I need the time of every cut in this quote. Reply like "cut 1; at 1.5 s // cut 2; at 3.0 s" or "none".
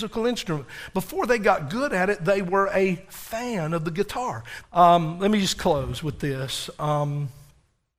cut 1; at 4.6 s